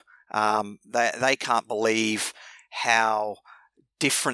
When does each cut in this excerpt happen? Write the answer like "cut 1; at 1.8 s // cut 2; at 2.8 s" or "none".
none